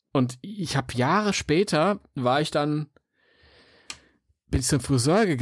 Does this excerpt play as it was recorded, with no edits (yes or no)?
yes